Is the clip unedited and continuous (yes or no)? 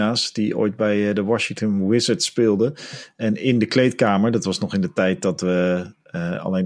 yes